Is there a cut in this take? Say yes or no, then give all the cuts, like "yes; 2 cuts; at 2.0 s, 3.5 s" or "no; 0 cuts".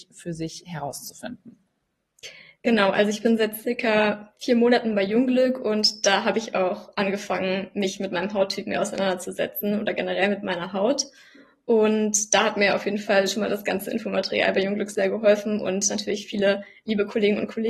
no; 0 cuts